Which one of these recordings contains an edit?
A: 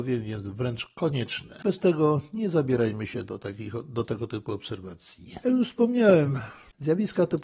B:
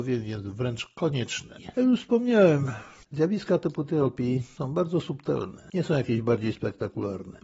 B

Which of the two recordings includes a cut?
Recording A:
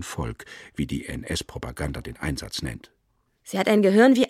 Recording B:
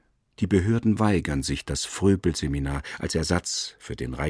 A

